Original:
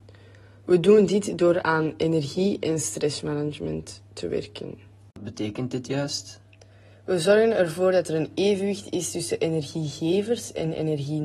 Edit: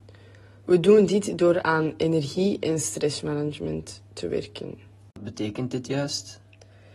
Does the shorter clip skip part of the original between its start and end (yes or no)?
no